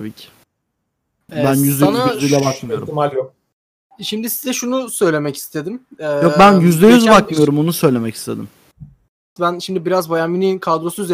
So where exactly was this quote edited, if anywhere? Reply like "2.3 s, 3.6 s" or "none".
9.4 s